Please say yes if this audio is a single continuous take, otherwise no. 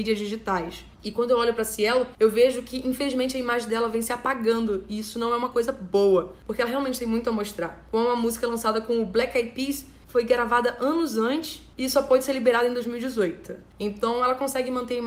no